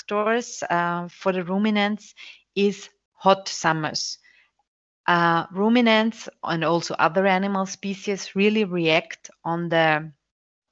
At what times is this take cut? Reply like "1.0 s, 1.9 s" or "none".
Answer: none